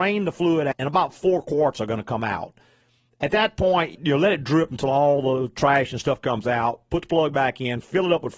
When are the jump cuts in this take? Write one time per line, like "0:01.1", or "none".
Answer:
none